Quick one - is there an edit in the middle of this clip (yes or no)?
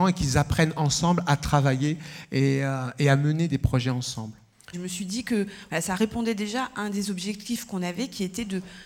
yes